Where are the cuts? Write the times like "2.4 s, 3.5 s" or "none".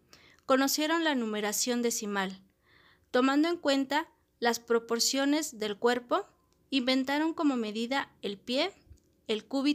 none